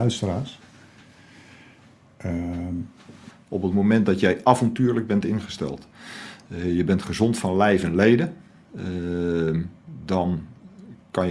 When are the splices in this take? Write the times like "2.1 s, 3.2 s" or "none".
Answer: 3.3 s